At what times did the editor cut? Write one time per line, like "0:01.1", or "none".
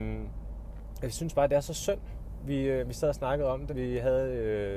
0:03.7